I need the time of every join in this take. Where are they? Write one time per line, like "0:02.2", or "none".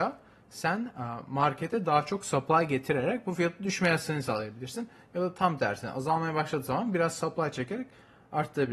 none